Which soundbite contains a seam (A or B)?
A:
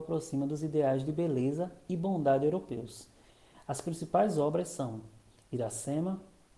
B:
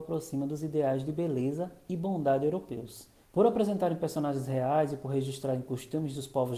B